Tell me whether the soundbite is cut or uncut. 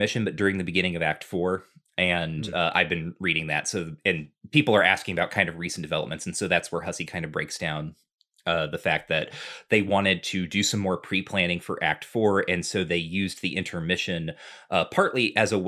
uncut